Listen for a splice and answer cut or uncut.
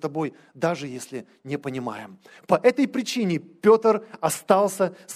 uncut